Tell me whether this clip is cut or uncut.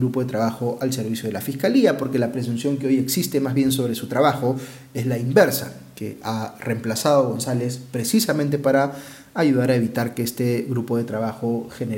uncut